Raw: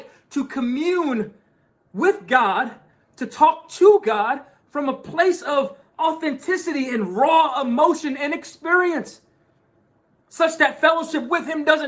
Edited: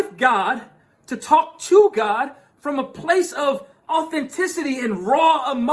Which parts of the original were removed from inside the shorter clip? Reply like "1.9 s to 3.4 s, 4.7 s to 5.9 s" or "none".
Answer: none